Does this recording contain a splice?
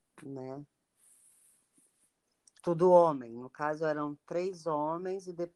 no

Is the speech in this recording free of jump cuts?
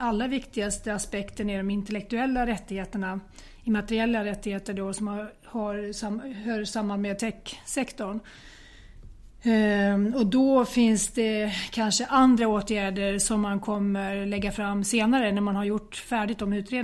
yes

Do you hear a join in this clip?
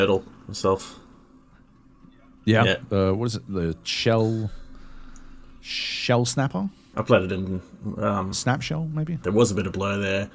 yes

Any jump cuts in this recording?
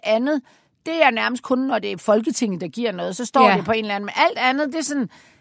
no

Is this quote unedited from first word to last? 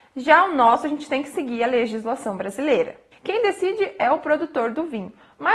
no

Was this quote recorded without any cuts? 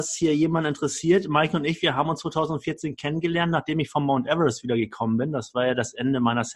yes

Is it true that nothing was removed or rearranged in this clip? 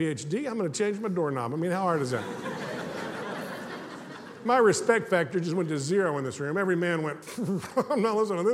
yes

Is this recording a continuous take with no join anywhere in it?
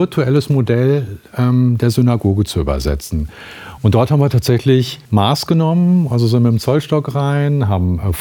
no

